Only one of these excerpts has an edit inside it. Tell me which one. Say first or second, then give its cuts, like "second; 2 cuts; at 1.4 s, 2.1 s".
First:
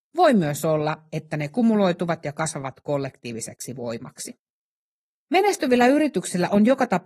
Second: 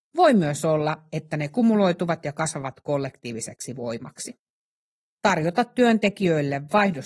second; 1 cut; at 5.1 s